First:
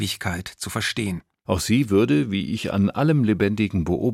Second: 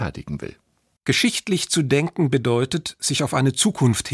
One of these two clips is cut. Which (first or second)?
first